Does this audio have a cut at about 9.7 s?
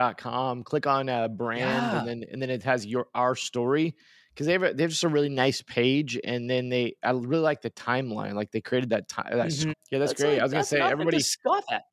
yes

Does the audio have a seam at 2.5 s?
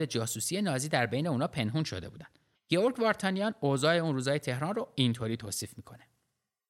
yes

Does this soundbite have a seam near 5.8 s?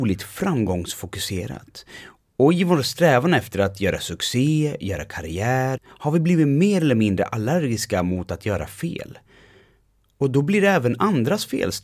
yes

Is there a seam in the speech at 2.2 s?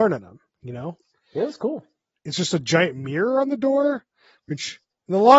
yes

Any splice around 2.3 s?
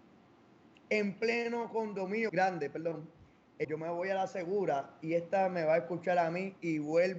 yes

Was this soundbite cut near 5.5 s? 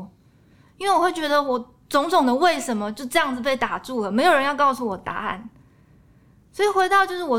no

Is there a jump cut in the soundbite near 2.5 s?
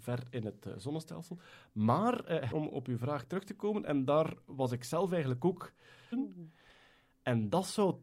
yes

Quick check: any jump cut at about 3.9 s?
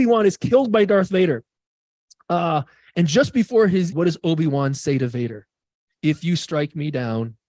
yes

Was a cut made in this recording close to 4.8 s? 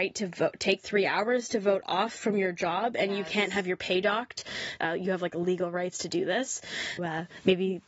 yes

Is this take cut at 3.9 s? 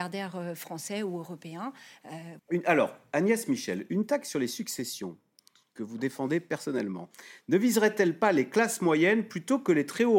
no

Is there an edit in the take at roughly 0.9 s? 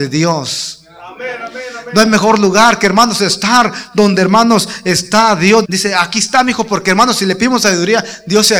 no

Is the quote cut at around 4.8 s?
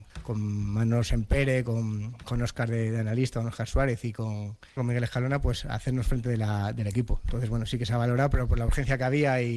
yes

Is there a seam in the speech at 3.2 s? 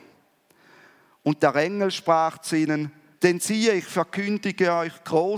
yes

